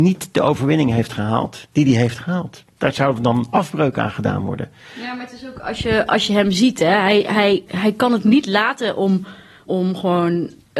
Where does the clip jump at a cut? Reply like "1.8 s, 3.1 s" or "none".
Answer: 7.7 s, 9.7 s